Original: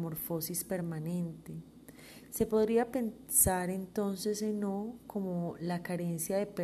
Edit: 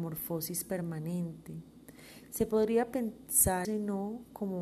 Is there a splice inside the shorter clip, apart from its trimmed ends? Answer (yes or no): yes